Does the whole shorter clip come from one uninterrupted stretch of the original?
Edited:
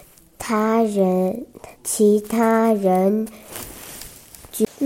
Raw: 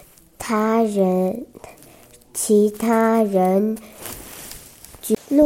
no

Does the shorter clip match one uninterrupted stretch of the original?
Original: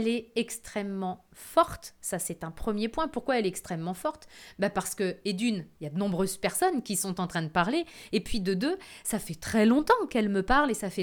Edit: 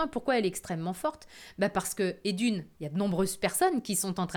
yes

